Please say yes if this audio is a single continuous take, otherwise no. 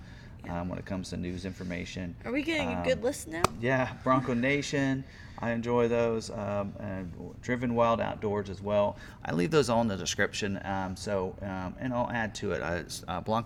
yes